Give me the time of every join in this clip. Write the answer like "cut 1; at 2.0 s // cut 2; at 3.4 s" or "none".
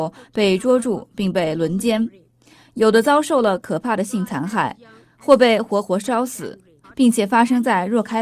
cut 1; at 6.8 s